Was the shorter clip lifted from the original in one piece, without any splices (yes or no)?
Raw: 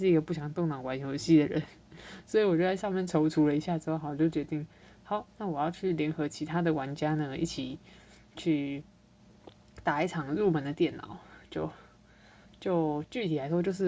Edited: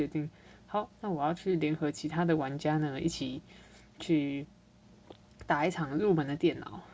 yes